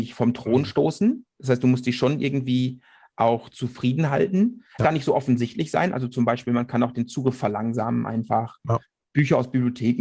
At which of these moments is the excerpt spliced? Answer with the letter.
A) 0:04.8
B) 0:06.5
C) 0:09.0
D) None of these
A